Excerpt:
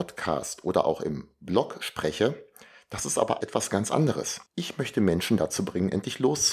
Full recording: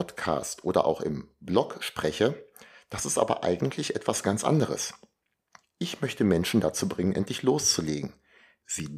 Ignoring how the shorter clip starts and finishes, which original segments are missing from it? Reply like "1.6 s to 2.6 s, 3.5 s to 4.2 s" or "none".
3.4 s to 3.9 s, 5.0 s to 5.7 s

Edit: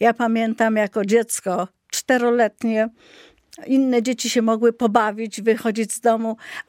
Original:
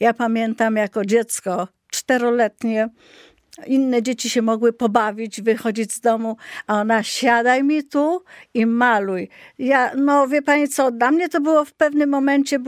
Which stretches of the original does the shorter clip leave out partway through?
none

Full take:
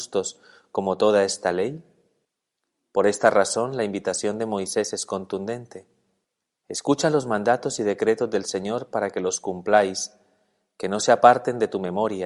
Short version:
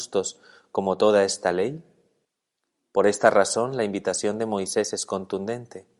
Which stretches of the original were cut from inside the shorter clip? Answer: none

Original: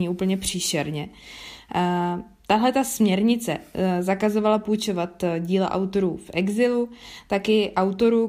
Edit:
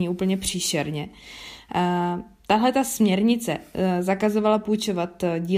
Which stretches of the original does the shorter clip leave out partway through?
none

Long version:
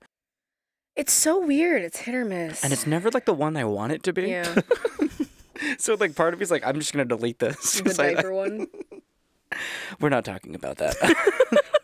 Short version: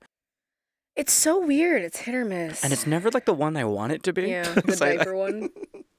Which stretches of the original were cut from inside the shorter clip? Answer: 4.6 s to 7.8 s

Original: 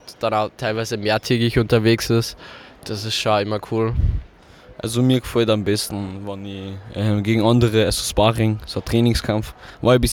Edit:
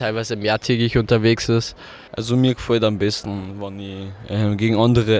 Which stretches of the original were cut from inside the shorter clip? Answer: 2.7 s to 4.7 s

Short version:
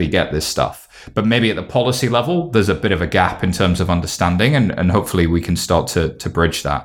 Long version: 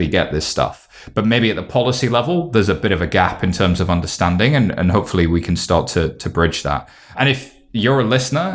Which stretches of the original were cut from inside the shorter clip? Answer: none

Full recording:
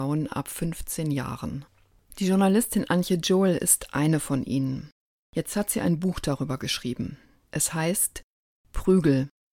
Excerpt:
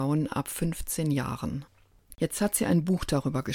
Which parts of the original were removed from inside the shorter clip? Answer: 2.1 s to 5.3 s

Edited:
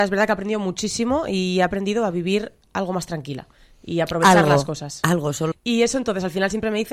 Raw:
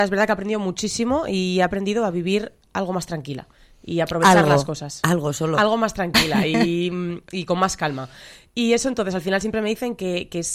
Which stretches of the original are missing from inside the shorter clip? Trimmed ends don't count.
5.5 s to 8.4 s

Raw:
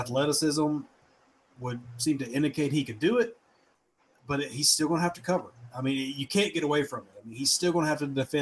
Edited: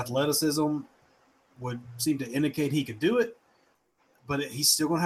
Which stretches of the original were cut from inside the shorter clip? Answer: none

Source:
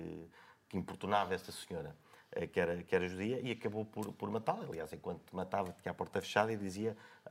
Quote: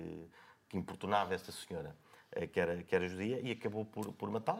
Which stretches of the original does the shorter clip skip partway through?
none

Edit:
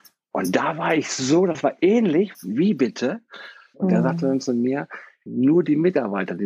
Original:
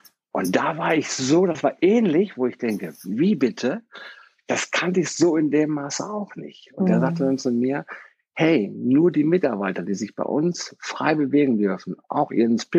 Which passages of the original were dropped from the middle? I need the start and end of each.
2.3 s to 3.0 s, 4.4 s to 6.7 s, 8.2 s to 8.7 s

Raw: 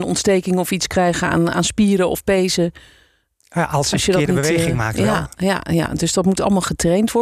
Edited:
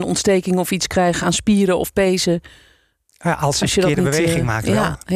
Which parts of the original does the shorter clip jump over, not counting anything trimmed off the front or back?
1.2 s to 1.5 s

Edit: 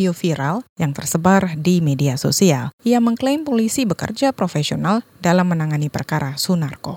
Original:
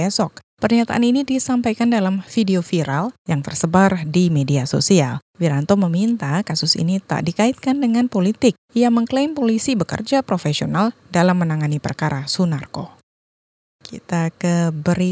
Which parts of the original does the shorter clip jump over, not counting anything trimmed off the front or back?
5.3 s to 8.7 s

